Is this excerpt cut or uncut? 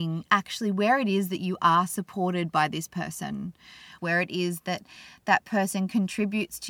cut